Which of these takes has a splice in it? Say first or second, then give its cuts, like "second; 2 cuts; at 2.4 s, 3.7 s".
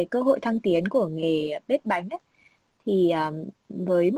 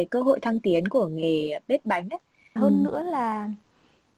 second; 1 cut; at 2.6 s